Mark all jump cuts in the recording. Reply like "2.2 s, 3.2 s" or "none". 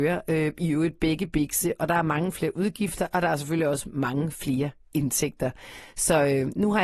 none